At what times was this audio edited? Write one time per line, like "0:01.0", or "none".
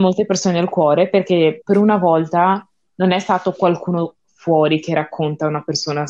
0:01.6